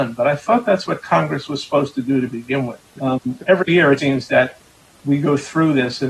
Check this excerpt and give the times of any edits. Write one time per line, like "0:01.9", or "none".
0:02.9
0:04.0

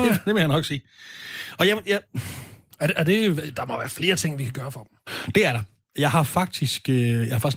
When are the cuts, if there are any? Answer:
none

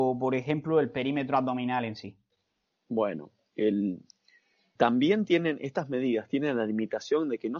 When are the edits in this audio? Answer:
0:04.8

